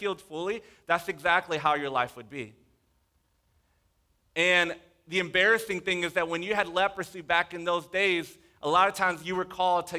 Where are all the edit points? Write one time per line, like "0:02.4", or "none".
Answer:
none